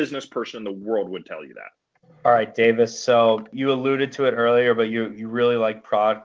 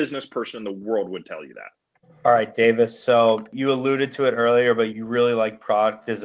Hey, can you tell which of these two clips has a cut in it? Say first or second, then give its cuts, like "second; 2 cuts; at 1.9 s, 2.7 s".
second; 1 cut; at 4.9 s